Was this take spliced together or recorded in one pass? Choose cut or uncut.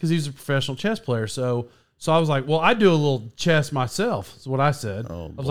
uncut